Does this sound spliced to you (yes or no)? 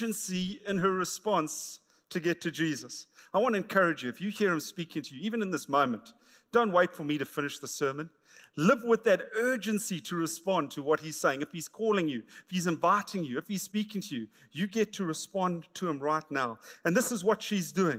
no